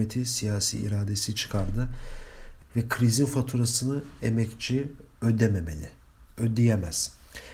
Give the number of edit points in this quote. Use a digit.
1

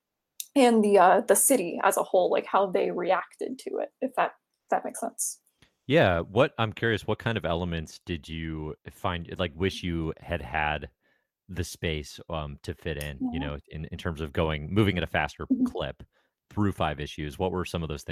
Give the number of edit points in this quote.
1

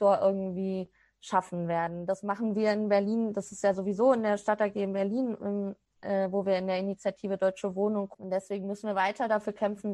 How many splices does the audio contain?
1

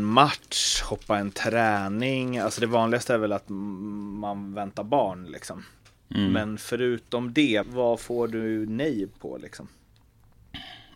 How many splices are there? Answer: 1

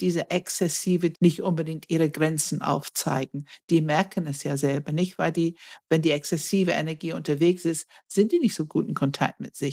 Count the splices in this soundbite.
1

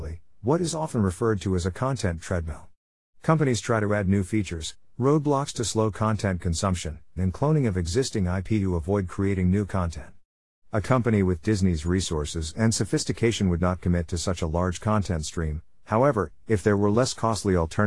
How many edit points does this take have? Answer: 1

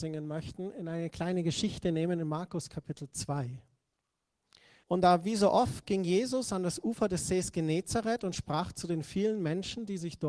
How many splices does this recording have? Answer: 1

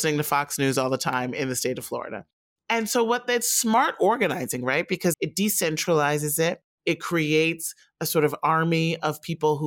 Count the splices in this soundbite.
1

